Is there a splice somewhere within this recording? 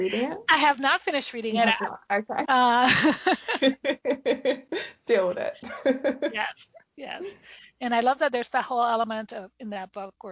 yes; 1 cut; at 2.4 s

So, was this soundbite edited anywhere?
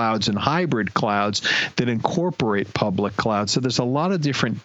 no; 0 cuts

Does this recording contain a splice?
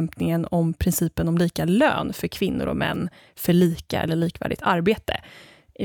no; 0 cuts

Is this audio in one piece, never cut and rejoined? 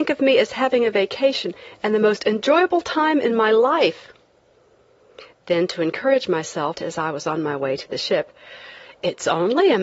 no; 1 cut; at 6.7 s

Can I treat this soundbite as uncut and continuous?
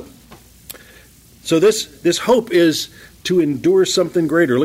yes; 0 cuts

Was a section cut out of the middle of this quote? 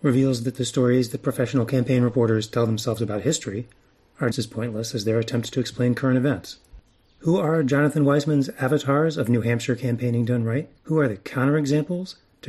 yes; 2 cuts; at 4.3 s, 10.8 s

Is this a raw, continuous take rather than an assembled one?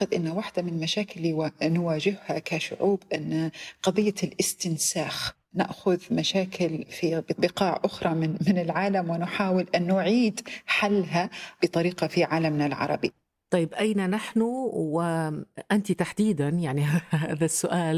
yes; 0 cuts

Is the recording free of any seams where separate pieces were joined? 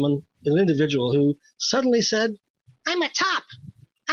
yes; 0 cuts

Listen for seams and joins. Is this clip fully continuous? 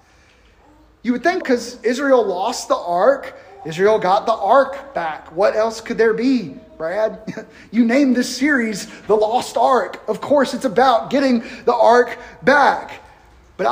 no; 1 cut; at 1.4 s

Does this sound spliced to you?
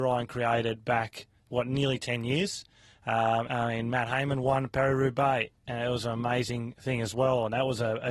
yes; 1 cut; at 3.4 s

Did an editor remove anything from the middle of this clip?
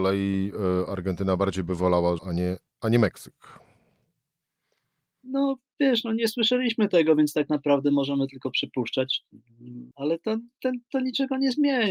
yes; 2 cuts; at 2.2 s, 9.9 s

